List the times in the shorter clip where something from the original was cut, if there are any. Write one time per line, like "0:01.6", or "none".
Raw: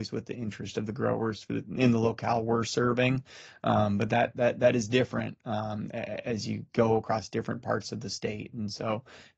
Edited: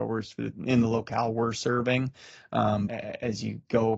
0:02.9